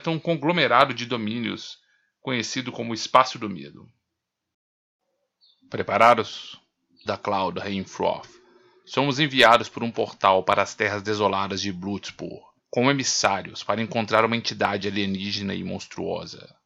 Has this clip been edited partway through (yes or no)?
yes